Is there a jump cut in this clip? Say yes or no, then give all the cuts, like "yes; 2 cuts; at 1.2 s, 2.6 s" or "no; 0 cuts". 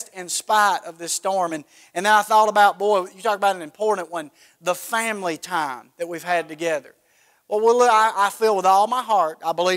no; 0 cuts